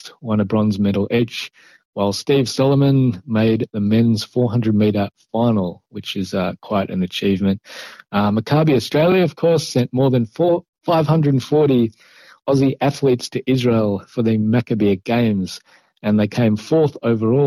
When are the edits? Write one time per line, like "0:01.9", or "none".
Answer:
none

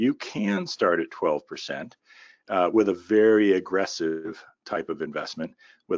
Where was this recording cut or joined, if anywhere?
none

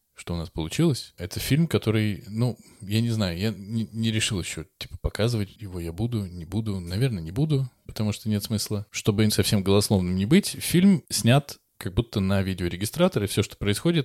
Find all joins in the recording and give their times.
0:09.3

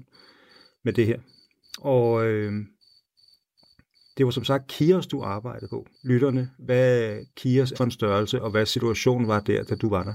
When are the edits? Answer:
0:05.9
0:07.7

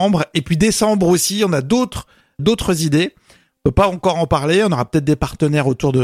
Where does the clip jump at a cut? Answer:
0:02.4

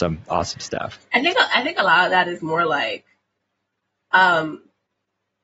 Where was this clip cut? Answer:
none

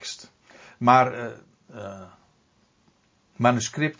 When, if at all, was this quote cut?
0:01.7

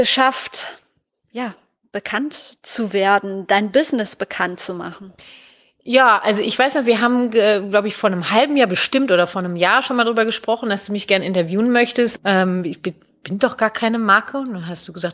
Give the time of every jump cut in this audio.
0:12.2

